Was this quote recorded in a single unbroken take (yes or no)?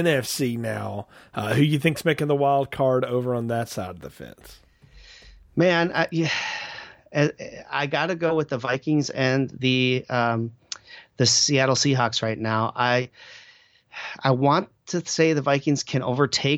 yes